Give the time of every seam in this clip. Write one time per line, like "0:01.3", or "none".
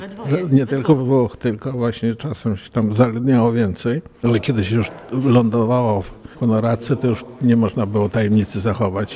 0:04.2

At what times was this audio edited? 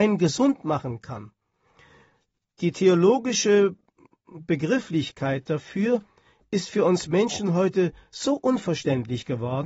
none

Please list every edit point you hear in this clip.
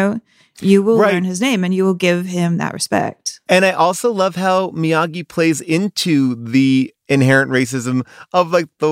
none

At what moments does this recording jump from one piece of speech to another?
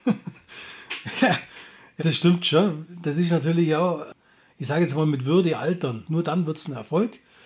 0:02.0
0:06.0

